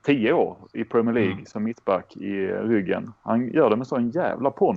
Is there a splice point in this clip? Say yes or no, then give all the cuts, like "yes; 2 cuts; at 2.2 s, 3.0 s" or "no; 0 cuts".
no; 0 cuts